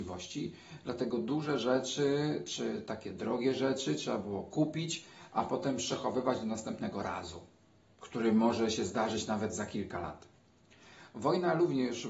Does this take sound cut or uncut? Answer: uncut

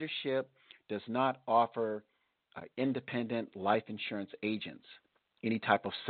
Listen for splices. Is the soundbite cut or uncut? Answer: uncut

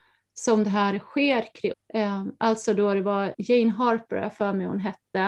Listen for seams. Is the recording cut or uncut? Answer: cut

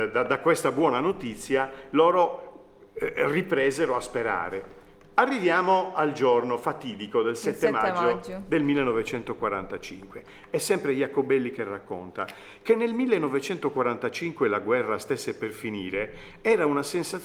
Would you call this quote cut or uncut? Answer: uncut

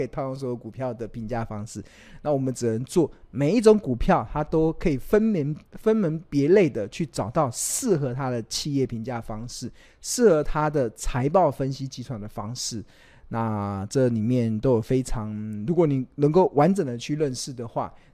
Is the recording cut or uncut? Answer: uncut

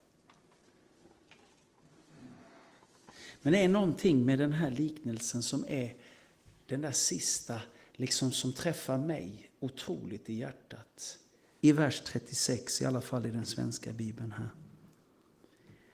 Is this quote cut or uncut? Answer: cut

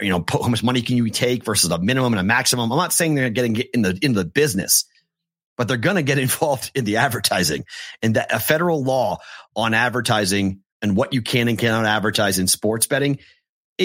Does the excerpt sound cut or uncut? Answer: uncut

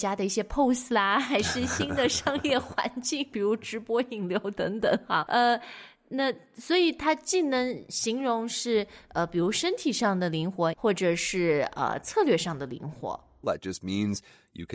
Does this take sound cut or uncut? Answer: cut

